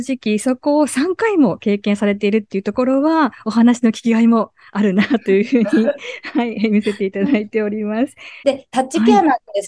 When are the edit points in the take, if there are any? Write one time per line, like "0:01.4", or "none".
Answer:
0:08.4